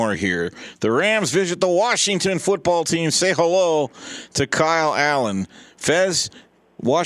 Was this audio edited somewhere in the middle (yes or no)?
no